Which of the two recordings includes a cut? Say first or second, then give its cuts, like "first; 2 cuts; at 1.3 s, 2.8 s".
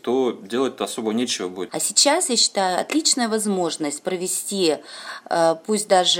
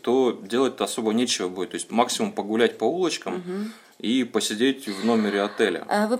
first; 1 cut; at 1.7 s